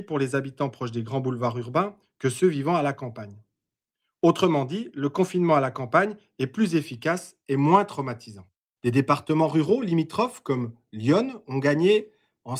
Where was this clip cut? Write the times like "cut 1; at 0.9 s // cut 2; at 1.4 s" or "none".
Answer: cut 1; at 8.8 s

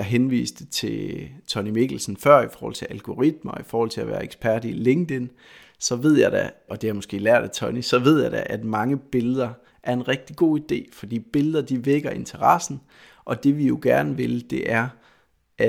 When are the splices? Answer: cut 1; at 6.7 s

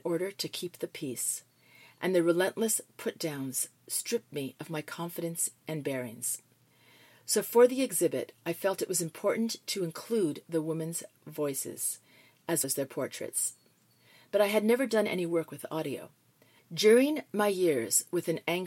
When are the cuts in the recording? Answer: cut 1; at 12.6 s // cut 2; at 16.6 s

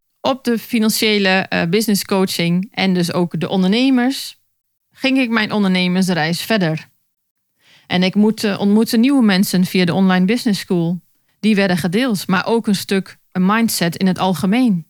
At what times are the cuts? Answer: cut 1; at 11.3 s

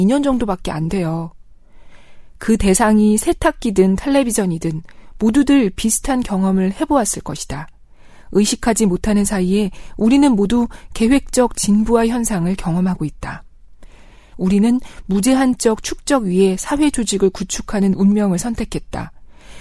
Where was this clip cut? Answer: cut 1; at 14.3 s

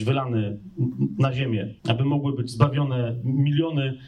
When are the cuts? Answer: cut 1; at 1.8 s

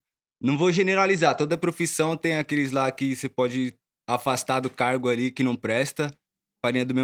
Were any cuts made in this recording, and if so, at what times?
none

